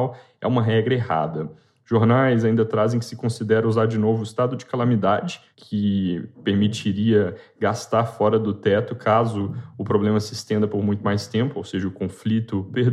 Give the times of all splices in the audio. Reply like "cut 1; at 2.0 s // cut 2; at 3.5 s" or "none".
none